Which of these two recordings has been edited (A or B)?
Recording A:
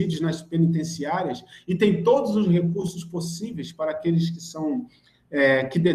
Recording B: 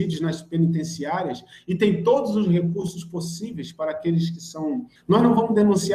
B